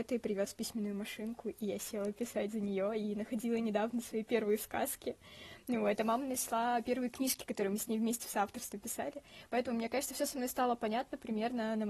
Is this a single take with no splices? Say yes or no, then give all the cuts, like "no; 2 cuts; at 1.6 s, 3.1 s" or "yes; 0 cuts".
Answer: yes; 0 cuts